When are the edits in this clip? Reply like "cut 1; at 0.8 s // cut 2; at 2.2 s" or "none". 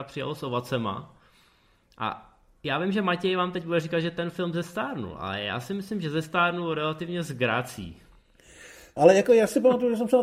cut 1; at 9.0 s